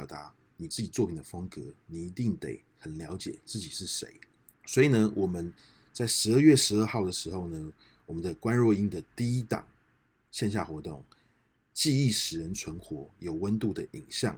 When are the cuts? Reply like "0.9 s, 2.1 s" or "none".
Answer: 4.5 s